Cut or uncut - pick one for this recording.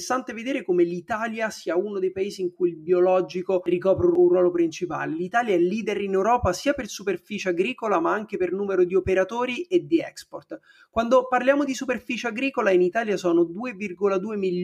uncut